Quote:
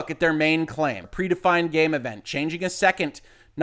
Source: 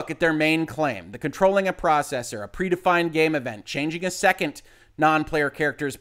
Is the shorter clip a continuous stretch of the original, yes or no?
no